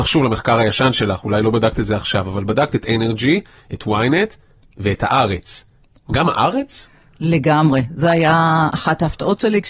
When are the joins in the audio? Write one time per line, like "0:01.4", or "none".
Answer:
none